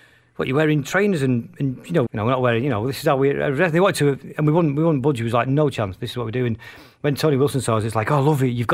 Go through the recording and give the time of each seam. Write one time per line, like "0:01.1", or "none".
0:02.1